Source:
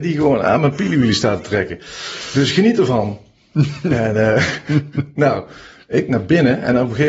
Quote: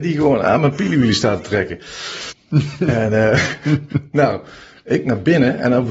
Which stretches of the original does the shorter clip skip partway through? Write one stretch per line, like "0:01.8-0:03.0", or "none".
0:02.3-0:03.3